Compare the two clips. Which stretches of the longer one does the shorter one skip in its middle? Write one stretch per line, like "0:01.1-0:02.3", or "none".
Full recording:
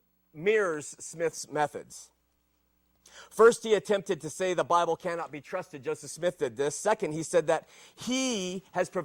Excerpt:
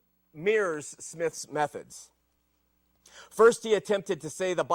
none